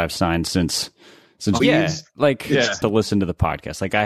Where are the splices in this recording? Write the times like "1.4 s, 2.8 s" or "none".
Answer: 1.6 s, 2.8 s